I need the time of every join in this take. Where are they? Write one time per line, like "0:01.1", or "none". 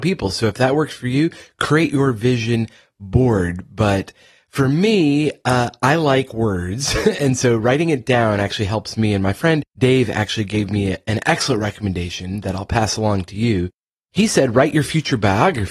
none

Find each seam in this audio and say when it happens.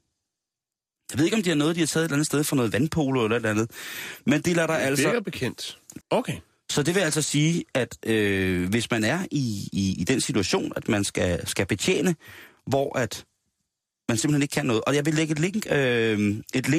0:06.0

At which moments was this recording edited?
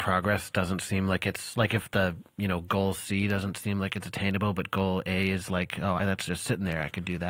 none

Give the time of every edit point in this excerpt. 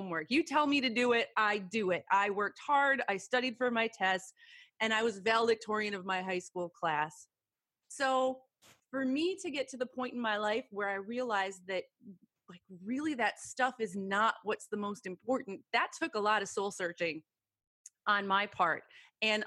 none

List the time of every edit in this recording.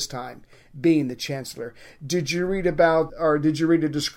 0:03.1

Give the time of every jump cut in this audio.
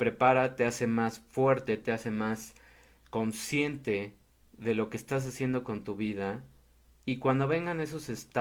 0:01.8

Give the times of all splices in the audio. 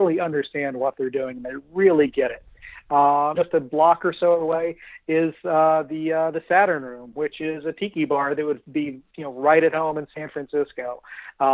0:03.4

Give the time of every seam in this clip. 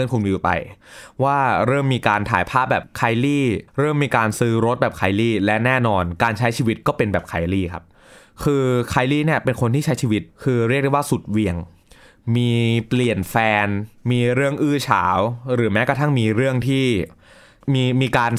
0:03.7
0:10.3

